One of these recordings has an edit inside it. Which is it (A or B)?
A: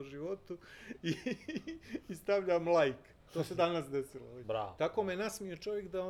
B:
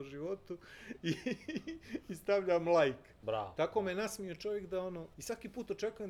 B